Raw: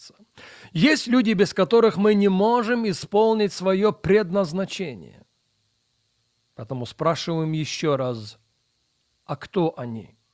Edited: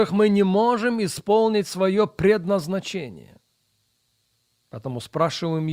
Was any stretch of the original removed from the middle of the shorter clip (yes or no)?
no